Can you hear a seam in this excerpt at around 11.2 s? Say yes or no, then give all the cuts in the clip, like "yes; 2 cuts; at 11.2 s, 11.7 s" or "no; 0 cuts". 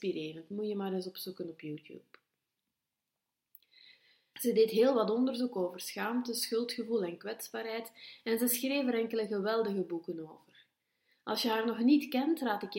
no; 1 cut; at 4.3 s